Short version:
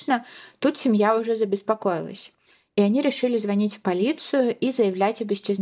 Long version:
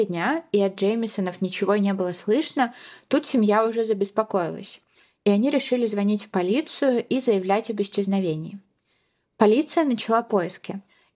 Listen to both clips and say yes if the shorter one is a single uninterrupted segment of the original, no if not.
yes